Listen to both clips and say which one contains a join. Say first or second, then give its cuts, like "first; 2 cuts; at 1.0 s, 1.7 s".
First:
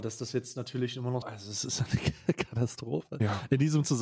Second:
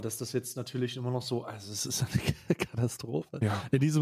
first; 1 cut; at 1.2 s